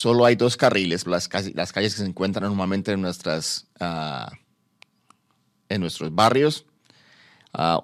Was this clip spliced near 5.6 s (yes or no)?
no